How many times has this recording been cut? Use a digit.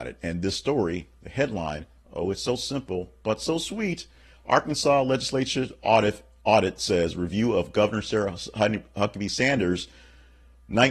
0